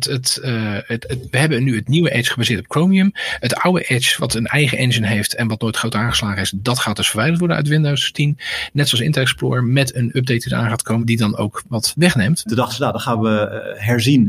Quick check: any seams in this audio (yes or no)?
yes